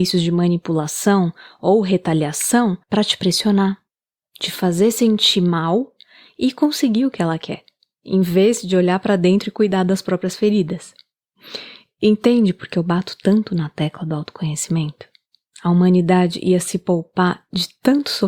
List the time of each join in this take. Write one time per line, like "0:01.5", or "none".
0:02.8